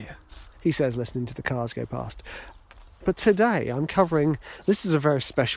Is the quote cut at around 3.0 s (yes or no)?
yes